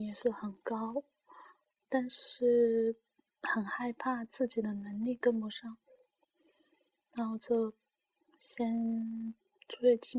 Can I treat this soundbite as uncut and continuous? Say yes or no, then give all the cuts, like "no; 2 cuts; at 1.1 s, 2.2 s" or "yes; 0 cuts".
yes; 0 cuts